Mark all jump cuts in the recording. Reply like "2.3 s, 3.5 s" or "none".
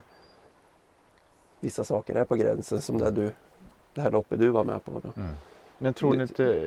none